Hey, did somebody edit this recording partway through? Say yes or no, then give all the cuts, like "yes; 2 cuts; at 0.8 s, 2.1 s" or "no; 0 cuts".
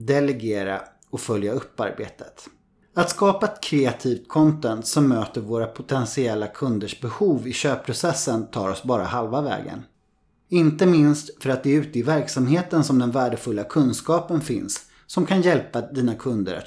yes; 2 cuts; at 2.8 s, 10.4 s